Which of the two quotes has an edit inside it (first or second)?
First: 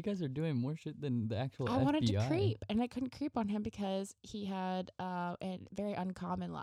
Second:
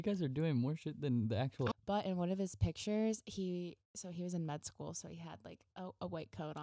second